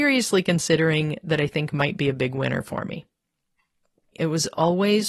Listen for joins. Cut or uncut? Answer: cut